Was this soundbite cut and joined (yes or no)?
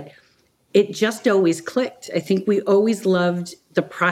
no